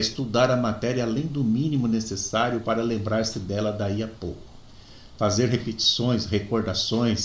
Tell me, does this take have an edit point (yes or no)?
no